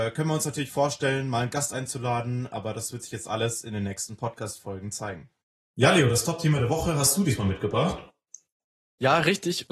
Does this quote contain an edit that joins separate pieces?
yes; 1 cut; at 5.6 s

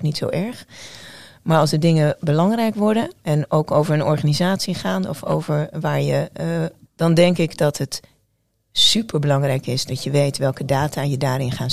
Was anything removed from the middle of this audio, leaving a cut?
yes; 1 cut; at 6.9 s

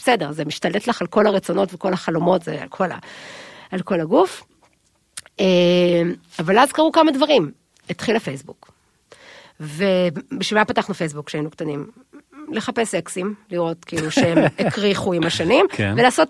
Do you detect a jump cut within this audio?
no; 0 cuts

